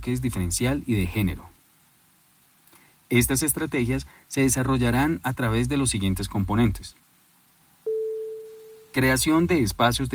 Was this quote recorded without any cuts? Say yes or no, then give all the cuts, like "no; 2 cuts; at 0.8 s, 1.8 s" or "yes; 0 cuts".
yes; 0 cuts